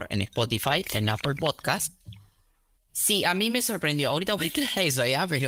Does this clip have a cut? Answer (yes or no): yes